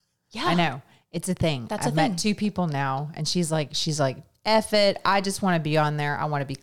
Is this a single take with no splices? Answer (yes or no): yes